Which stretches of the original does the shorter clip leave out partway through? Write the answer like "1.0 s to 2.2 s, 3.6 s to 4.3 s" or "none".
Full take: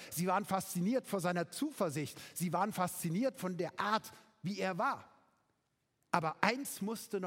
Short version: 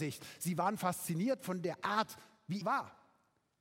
4.6 s to 4.7 s